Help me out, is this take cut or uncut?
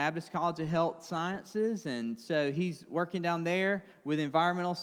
uncut